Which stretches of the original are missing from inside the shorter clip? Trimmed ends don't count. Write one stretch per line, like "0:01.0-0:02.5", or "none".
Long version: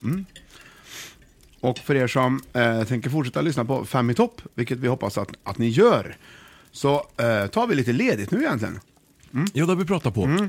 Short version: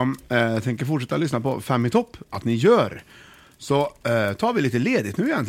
0:04.5-0:05.4